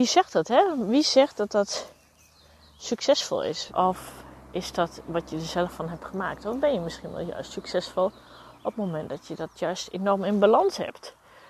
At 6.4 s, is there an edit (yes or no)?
no